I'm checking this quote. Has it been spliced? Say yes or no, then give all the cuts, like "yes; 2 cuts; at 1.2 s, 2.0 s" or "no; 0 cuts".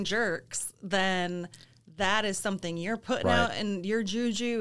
no; 0 cuts